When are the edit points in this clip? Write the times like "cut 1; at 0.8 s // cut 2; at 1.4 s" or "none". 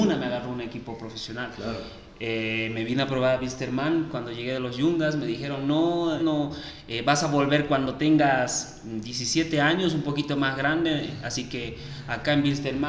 cut 1; at 6.2 s